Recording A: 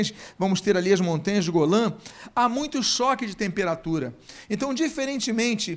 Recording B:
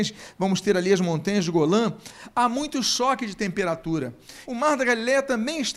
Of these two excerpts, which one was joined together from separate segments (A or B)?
B